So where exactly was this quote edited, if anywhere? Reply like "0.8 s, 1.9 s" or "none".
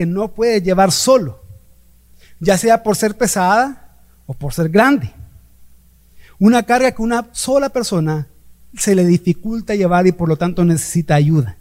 none